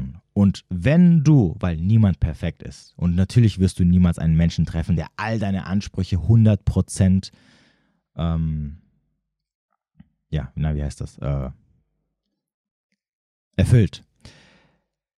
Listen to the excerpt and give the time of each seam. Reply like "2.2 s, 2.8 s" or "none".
none